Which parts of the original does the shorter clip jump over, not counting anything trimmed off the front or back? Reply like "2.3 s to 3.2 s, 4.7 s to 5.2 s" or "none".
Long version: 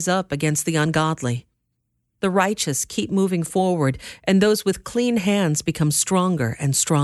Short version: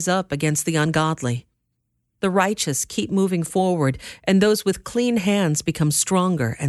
none